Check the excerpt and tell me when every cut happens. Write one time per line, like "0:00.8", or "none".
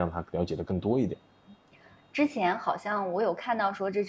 none